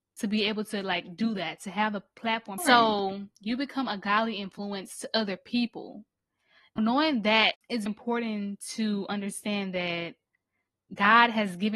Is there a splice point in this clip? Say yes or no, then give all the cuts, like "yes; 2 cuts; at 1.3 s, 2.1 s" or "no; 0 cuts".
yes; 3 cuts; at 2.6 s, 6.8 s, 7.9 s